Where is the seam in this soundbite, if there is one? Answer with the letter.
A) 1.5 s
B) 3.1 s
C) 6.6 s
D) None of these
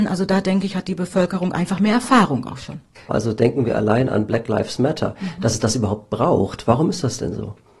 B